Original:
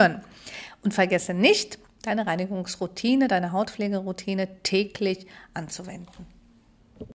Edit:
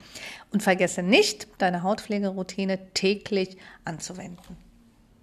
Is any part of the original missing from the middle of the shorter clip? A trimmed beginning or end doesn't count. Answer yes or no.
yes